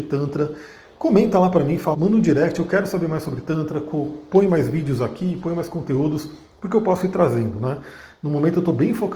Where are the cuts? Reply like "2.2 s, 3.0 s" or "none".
1.9 s